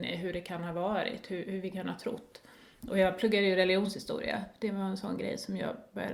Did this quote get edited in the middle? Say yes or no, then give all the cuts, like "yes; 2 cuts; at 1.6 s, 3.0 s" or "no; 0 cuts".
no; 0 cuts